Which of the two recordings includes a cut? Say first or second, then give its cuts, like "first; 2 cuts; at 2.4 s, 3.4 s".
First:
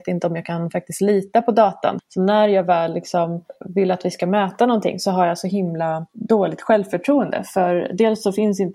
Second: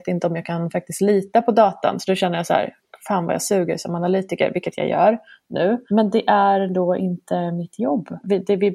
first; 1 cut; at 2.0 s